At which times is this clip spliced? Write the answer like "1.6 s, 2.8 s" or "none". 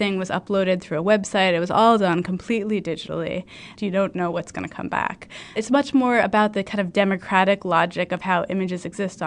3.7 s, 5.6 s

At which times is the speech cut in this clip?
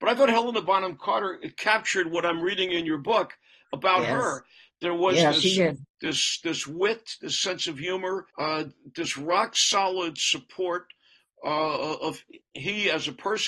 5.9 s, 8.3 s

